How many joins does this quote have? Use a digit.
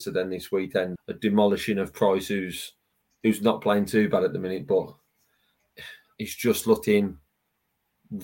1